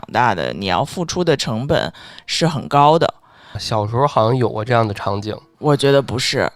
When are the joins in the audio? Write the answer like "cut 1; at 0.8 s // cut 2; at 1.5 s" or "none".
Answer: cut 1; at 3.5 s // cut 2; at 5.5 s